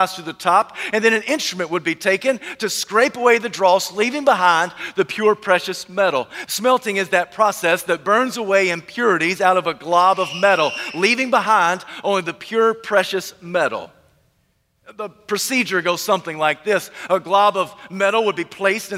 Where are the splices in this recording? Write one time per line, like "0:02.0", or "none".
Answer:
0:06.5